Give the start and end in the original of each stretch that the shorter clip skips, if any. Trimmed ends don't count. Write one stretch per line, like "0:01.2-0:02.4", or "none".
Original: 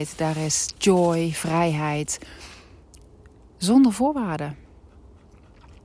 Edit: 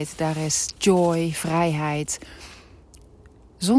none